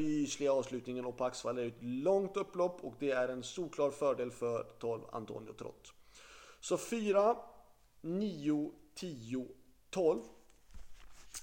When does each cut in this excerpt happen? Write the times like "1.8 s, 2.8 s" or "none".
none